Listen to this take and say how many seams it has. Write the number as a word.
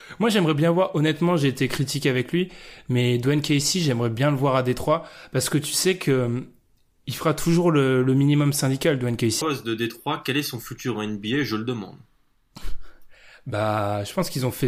one